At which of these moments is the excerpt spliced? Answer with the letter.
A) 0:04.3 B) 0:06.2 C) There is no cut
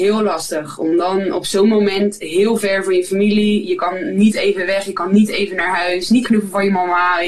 B